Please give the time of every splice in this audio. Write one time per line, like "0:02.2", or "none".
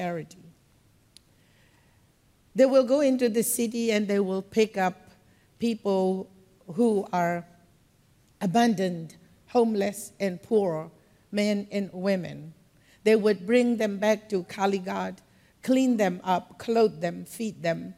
none